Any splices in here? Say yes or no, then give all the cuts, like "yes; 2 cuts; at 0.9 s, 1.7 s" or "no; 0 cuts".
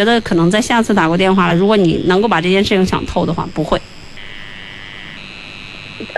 no; 0 cuts